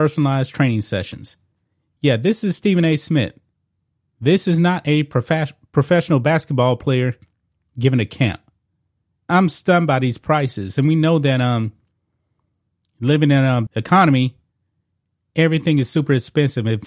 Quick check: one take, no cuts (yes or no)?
no